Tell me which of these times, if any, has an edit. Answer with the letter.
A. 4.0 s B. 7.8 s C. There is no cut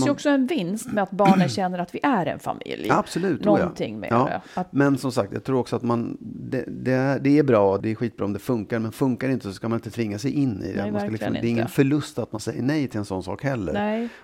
B